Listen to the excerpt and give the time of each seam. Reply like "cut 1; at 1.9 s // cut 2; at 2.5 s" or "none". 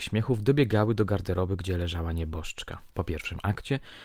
cut 1; at 2.9 s